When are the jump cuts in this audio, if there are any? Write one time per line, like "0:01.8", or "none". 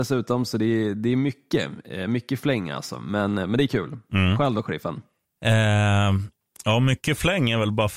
none